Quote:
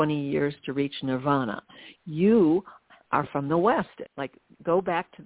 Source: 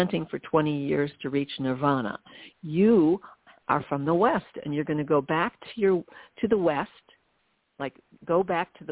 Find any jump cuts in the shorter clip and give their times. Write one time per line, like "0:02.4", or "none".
0:04.1